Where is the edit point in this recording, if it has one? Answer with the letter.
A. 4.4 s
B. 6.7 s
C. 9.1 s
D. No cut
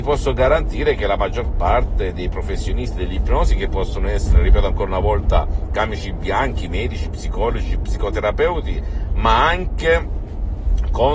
D